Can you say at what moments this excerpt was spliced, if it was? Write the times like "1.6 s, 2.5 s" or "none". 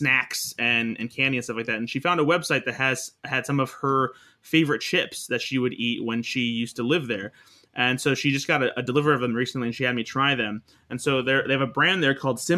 none

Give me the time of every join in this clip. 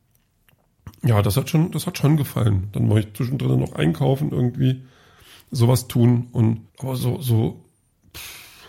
6.7 s

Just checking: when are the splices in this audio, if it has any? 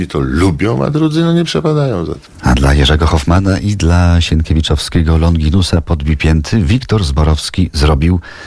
none

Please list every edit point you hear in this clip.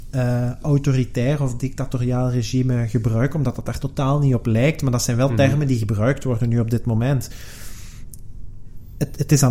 none

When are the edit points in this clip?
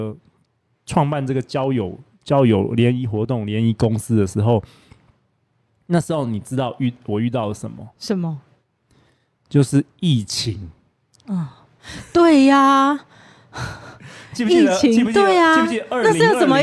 none

